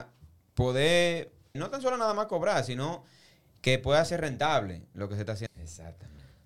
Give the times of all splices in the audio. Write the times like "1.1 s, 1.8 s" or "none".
1.5 s, 5.5 s